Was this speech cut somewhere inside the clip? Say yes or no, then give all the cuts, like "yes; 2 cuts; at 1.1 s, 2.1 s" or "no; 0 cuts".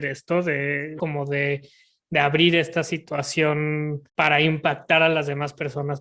yes; 2 cuts; at 1.0 s, 4.1 s